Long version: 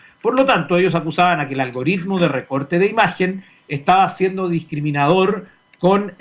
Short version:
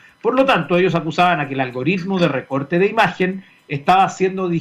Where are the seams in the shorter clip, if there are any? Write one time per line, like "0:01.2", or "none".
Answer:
none